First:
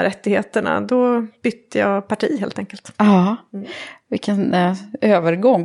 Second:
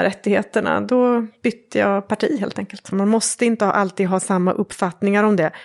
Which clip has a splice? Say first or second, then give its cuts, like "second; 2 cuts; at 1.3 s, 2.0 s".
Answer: second; 1 cut; at 2.9 s